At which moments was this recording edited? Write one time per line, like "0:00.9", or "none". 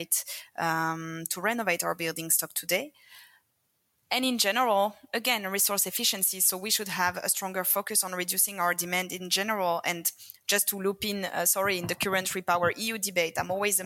none